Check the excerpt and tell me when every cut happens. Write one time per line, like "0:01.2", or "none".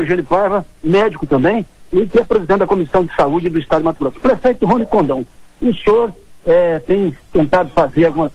none